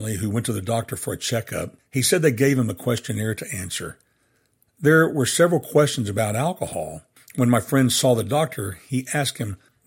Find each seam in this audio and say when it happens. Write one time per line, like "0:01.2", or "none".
none